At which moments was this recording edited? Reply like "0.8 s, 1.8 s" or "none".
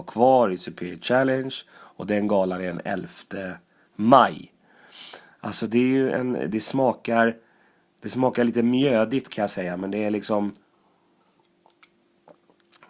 5.3 s